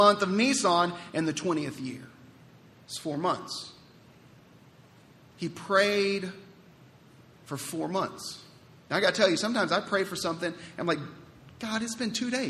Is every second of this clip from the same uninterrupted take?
yes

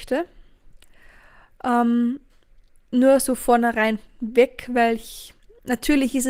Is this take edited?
no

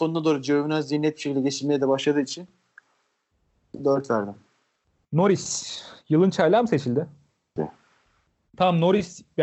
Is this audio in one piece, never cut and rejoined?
no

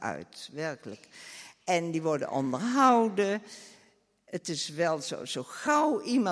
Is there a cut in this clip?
no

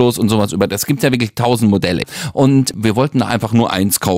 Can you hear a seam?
no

